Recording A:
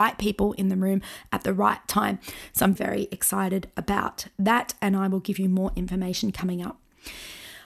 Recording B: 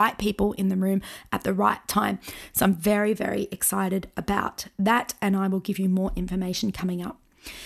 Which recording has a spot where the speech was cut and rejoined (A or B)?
A